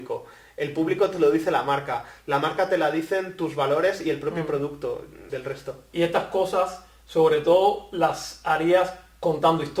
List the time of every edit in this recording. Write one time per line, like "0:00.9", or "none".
0:05.3